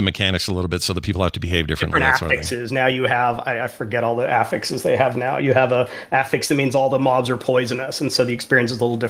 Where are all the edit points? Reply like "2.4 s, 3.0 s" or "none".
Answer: none